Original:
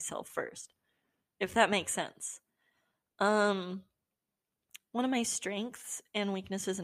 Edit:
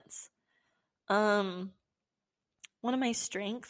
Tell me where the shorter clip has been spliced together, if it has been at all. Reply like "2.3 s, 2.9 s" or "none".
none

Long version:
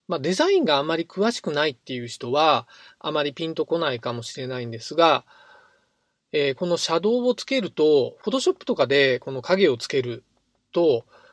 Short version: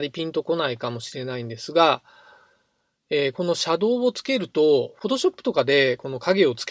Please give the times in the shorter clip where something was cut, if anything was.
none

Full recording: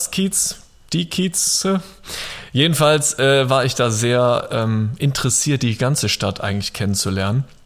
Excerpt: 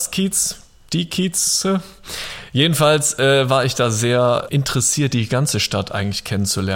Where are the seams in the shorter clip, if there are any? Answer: 4.5 s

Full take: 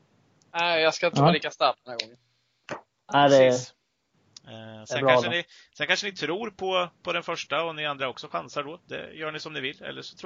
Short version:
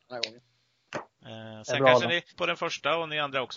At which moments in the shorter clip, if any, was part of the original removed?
1.2 s, 2.3 s

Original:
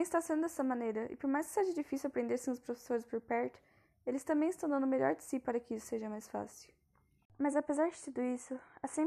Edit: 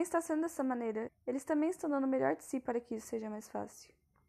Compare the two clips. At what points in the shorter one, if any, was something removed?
1.1 s

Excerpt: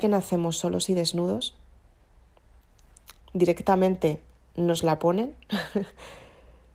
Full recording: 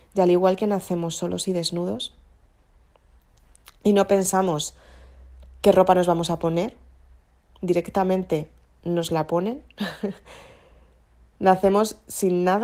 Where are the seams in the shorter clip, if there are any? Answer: 3.2 s

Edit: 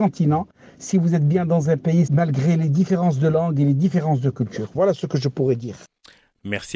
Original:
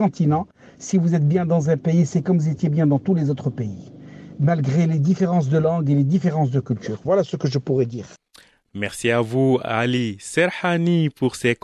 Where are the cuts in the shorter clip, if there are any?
2.1 s

